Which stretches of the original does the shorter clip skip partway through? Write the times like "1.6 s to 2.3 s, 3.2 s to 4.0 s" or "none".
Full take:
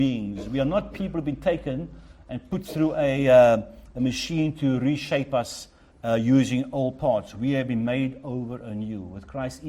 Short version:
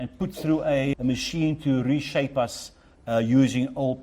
3.2 s to 3.9 s